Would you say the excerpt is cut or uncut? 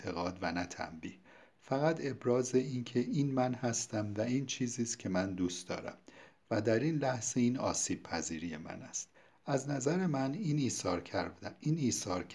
uncut